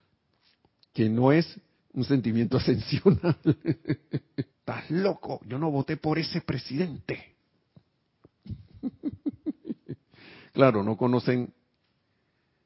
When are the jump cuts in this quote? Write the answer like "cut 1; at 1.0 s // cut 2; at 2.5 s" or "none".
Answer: cut 1; at 4.5 s // cut 2; at 7.4 s